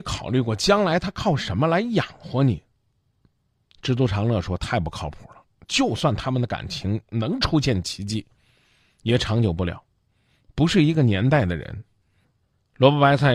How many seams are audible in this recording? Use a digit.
1